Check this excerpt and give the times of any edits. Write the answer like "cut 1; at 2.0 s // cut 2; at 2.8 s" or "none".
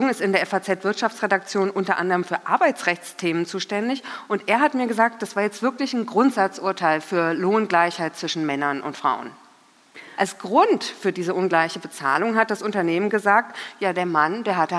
cut 1; at 10.2 s